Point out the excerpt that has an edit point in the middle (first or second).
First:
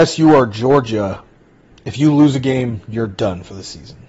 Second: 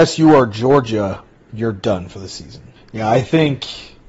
second